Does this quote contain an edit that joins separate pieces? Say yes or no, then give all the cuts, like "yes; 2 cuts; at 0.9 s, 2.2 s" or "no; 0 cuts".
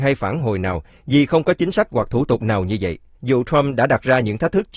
yes; 1 cut; at 3.1 s